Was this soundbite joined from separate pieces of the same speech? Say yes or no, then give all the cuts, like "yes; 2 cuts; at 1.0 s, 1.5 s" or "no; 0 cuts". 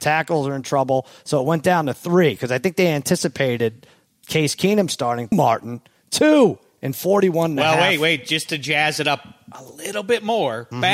yes; 1 cut; at 5.3 s